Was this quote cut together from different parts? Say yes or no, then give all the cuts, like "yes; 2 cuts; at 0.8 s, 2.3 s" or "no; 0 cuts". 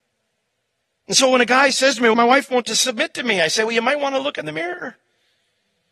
no; 0 cuts